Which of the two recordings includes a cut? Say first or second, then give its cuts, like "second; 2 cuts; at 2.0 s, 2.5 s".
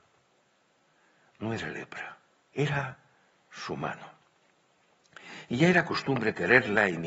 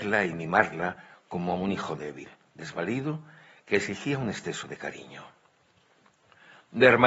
first; 1 cut; at 2.5 s